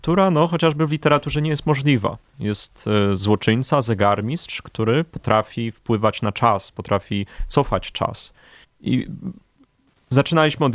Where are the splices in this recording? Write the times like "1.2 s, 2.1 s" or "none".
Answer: 2.3 s, 8.6 s